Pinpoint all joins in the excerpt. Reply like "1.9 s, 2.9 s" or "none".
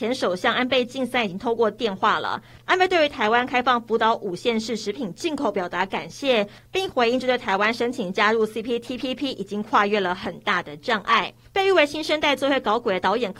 11.4 s